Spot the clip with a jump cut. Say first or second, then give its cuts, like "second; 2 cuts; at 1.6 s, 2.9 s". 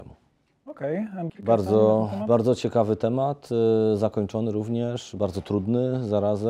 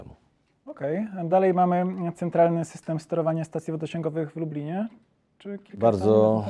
first; 1 cut; at 1.3 s